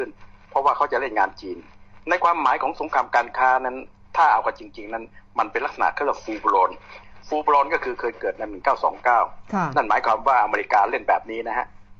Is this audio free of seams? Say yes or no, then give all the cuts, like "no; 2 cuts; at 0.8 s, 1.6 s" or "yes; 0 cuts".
yes; 0 cuts